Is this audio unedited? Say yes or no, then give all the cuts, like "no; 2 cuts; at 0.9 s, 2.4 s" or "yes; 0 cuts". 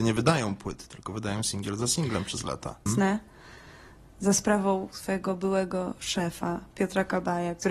no; 1 cut; at 2.9 s